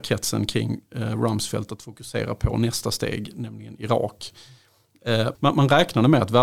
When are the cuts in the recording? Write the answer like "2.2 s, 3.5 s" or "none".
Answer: 5.3 s